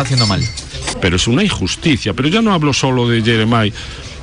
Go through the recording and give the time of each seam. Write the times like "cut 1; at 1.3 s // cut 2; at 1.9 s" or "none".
cut 1; at 0.9 s